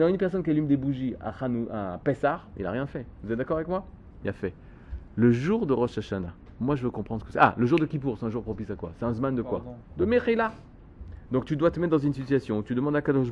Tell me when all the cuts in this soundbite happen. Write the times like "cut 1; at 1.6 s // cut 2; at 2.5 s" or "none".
none

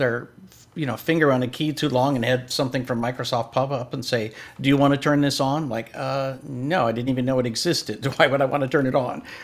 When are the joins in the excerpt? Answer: none

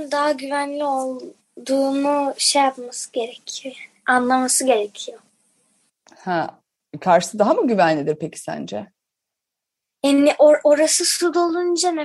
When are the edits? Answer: none

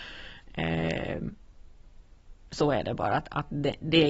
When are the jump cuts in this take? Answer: none

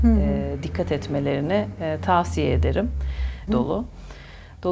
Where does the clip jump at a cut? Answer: cut 1; at 3.5 s

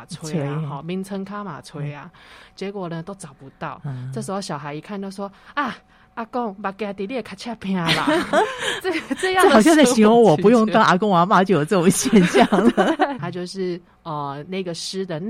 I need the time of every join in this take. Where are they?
cut 1; at 8.3 s // cut 2; at 13.2 s

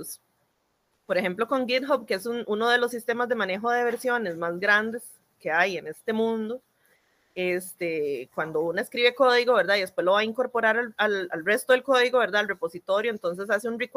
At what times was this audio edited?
cut 1; at 11.3 s

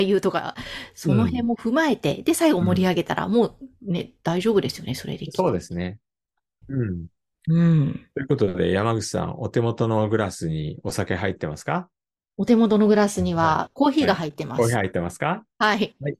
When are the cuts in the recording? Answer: cut 1; at 6.6 s

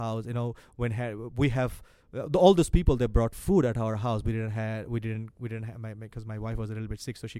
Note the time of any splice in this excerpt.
none

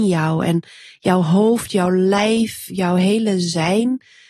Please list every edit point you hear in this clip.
cut 1; at 2.7 s

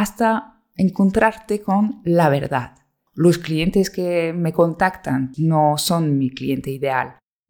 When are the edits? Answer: cut 1; at 3.1 s // cut 2; at 5.3 s

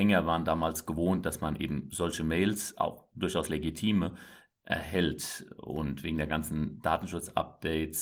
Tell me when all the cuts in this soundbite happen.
none

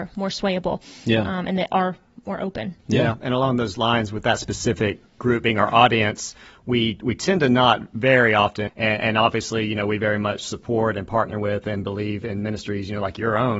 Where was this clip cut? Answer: cut 1; at 8.7 s

